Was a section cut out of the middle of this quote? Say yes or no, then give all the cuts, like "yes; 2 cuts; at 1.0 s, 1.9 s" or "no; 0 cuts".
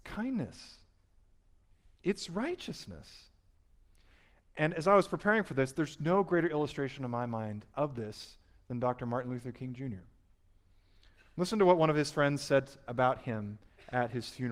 no; 0 cuts